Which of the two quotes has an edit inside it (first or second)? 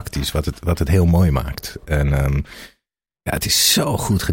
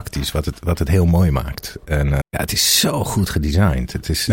second